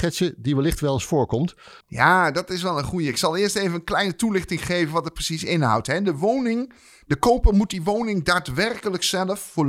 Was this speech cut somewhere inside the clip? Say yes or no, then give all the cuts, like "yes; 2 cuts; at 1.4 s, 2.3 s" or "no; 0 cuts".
yes; 1 cut; at 1.8 s